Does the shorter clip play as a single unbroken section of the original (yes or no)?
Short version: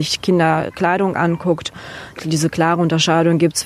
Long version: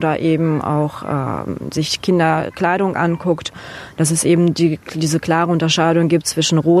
no